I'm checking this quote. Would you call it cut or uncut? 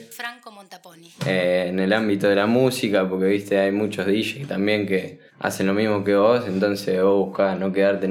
cut